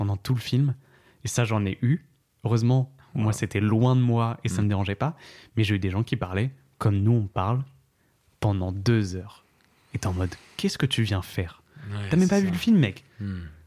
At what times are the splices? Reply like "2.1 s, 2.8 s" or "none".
none